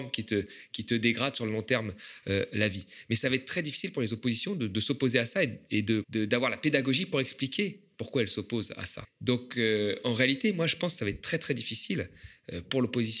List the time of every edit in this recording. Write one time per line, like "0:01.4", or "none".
0:06.0
0:09.0